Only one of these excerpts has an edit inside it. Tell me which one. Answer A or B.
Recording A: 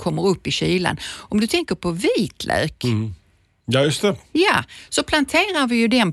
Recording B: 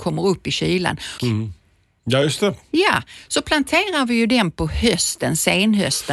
B